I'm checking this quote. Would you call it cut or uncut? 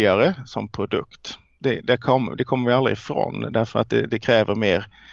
uncut